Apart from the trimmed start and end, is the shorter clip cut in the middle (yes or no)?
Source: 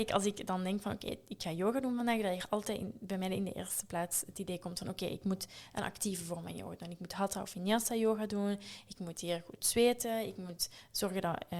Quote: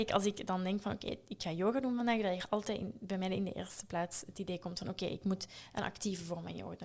no